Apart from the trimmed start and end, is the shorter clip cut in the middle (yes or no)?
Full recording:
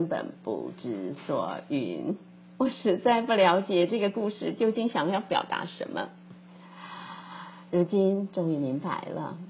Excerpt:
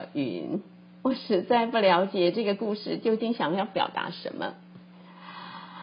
no